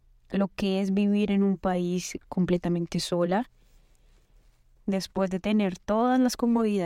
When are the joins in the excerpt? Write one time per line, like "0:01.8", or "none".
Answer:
0:04.8